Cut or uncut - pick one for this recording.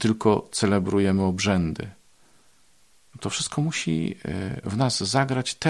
uncut